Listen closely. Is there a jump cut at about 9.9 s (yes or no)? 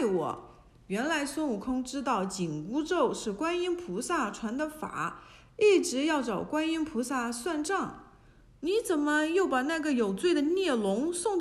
no